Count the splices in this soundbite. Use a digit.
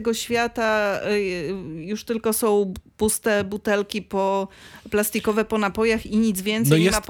0